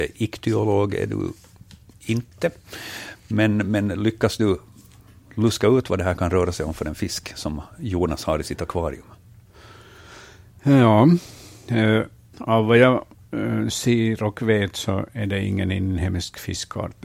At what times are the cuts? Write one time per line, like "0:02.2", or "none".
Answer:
0:12.3